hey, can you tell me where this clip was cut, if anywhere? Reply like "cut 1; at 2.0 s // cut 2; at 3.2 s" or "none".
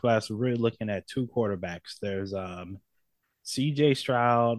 none